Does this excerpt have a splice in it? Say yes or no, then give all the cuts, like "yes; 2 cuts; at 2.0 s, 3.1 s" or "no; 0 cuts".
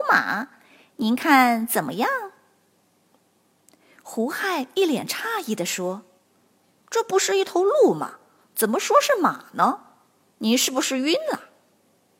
no; 0 cuts